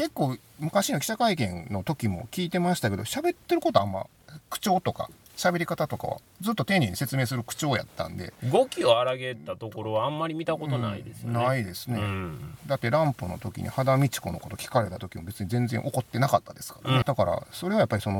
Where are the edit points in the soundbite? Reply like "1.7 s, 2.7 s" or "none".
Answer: 17.0 s